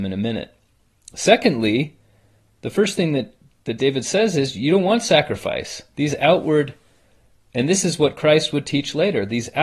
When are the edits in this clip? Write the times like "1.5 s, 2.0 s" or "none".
none